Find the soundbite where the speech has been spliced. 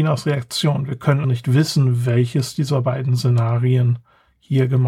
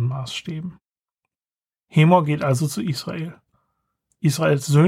first; 1 cut; at 1.2 s

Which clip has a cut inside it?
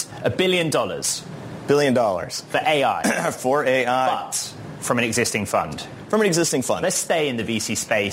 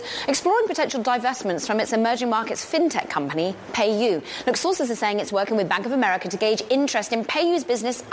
first; 1 cut; at 6.8 s

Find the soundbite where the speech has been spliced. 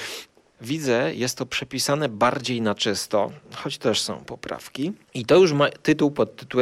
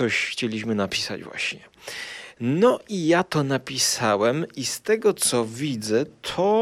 first; 1 cut; at 5.0 s

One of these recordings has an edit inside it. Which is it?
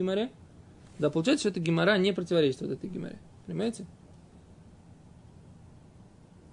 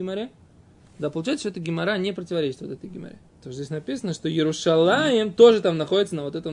second; 1 cut; at 3.3 s

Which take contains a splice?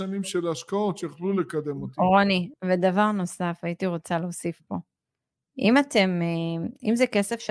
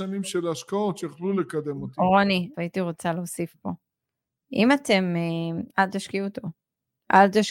second; 2 cuts; at 2.5 s, 5.7 s

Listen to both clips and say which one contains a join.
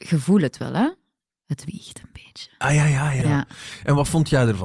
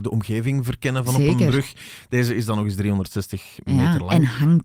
first; 1 cut; at 3.2 s

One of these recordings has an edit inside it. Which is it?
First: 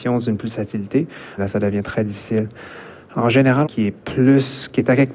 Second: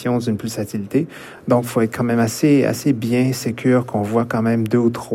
first; 2 cuts; at 1.4 s, 3.6 s

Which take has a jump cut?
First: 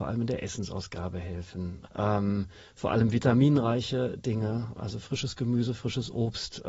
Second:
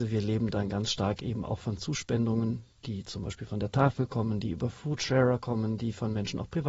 first; 2 cuts; at 1.9 s, 4.8 s

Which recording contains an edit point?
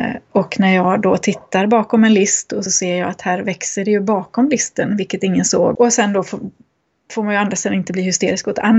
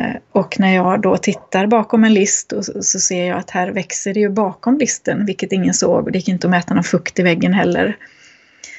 first; 2 cuts; at 2.7 s, 5.7 s

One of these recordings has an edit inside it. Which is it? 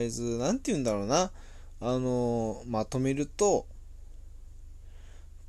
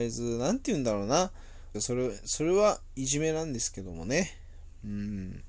second; 1 cut; at 1.7 s

